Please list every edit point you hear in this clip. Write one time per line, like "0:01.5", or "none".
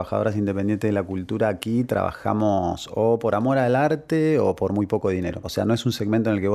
none

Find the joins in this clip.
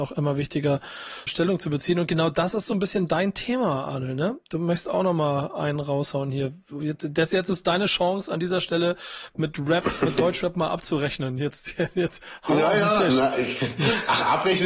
0:01.3

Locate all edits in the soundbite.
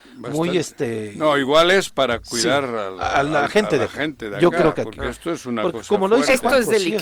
none

